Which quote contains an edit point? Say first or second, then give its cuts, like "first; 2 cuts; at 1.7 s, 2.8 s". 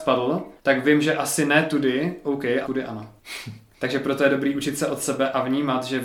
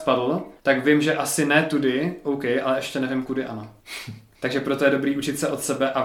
first; 1 cut; at 2.6 s